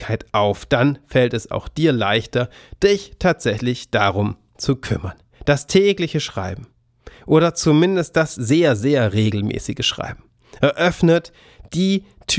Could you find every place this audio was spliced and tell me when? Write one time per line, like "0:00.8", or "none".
none